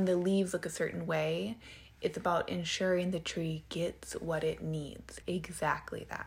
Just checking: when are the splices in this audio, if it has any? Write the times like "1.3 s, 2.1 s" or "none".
5.2 s